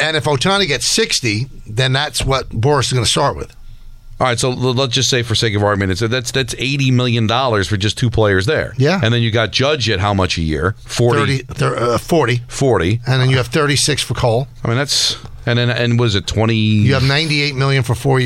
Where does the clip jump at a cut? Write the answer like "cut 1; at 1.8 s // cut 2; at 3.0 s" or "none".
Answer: none